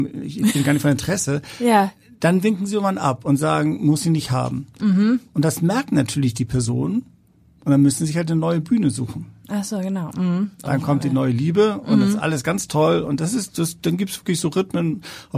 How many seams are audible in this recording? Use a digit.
1